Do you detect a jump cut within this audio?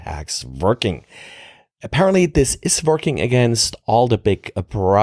no; 0 cuts

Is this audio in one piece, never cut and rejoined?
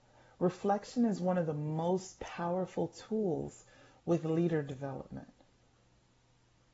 yes; 0 cuts

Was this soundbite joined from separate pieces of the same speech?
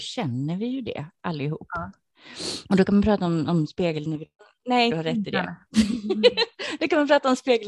yes; 2 cuts; at 2.6 s, 4.9 s

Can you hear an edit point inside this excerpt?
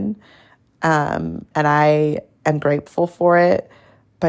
yes; 1 cut; at 1.5 s

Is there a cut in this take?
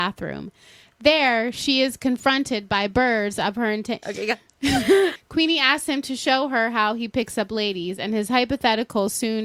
yes; 2 cuts; at 4.0 s, 5.2 s

